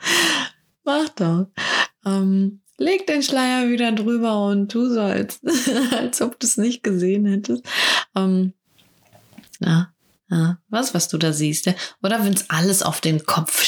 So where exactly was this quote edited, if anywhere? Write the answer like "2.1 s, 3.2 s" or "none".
9.6 s, 10.9 s